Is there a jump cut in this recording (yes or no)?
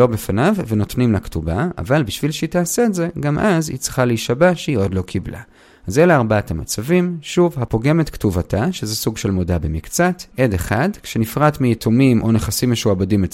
no